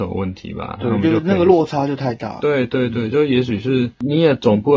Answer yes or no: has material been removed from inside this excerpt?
no